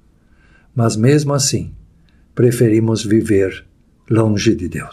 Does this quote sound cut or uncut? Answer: uncut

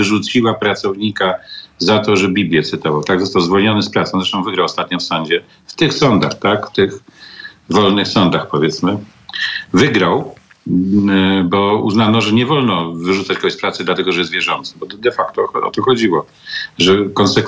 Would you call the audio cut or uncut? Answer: uncut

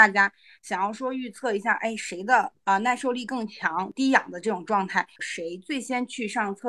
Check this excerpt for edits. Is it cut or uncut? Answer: cut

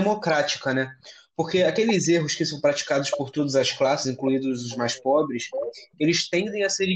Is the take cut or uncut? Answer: uncut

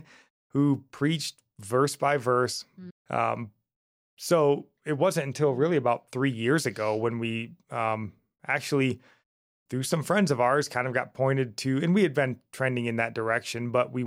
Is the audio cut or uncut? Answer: cut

